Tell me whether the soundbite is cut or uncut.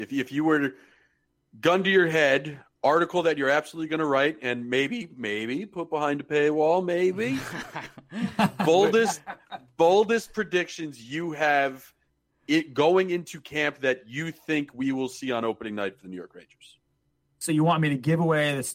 uncut